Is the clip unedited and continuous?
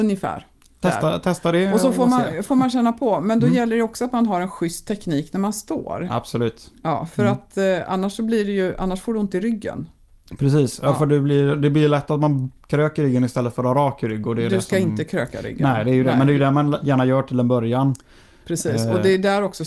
yes; 0 cuts

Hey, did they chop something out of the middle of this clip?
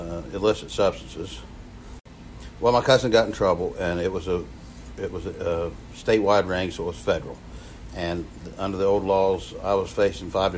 no; 0 cuts

